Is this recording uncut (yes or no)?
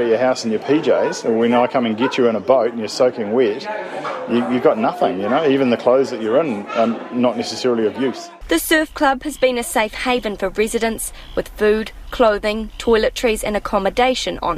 no